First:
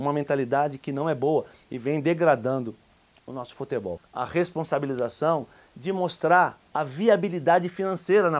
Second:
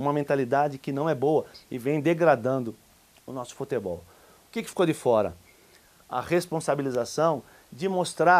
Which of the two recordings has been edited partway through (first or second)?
first